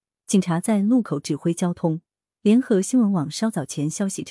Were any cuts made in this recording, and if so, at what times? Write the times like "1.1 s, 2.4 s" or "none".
none